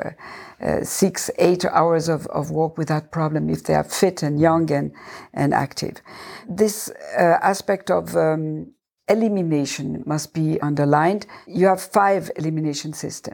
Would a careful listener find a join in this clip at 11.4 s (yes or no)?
no